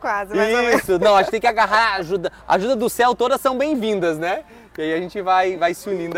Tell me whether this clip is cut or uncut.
uncut